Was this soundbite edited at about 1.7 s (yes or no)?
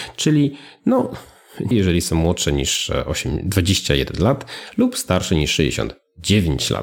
yes